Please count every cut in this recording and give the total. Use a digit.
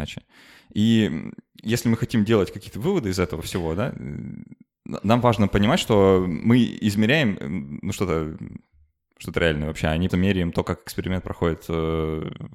1